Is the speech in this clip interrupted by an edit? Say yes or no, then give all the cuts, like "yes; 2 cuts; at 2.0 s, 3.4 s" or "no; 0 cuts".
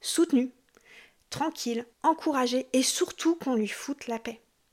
yes; 1 cut; at 1.9 s